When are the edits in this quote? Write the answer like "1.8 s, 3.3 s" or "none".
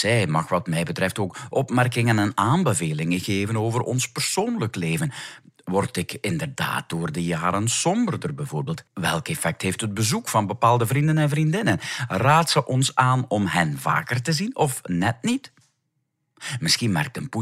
8.9 s

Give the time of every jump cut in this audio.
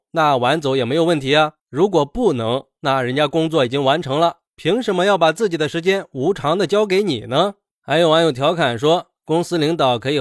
none

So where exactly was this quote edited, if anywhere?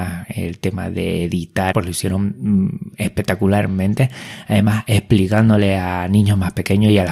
1.7 s

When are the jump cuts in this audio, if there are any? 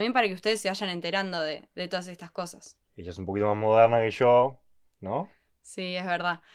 2.9 s

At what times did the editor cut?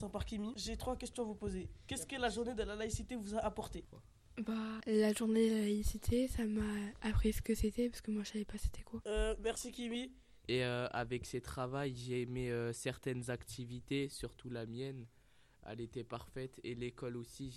10.4 s

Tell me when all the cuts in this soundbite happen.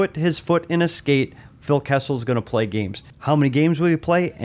3.1 s

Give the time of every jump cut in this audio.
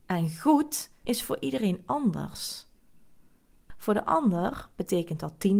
1.0 s, 3.7 s

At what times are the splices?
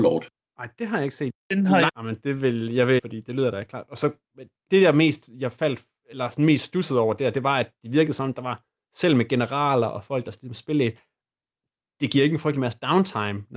1.9 s, 3.0 s, 4.7 s

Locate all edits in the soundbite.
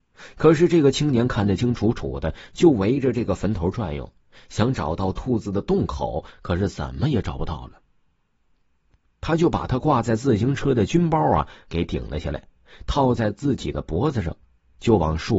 1.6 s, 9.1 s

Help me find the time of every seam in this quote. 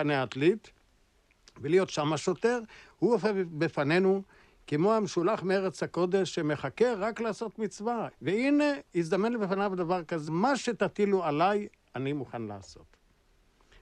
8.1 s, 10.3 s

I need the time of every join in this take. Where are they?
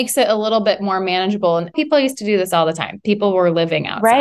none

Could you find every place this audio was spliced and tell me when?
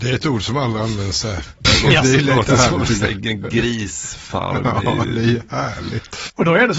1.6 s

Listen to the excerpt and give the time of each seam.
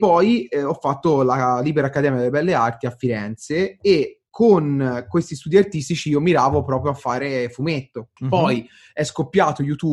8.2 s

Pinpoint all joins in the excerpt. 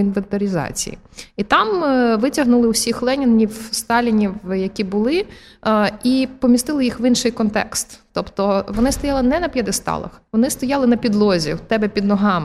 10.3 s

